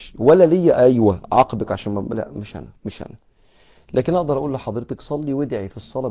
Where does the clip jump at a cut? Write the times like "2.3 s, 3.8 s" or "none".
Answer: 2.8 s